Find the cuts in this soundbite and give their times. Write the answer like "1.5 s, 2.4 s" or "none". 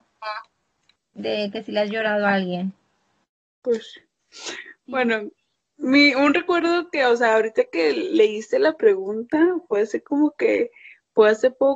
4.2 s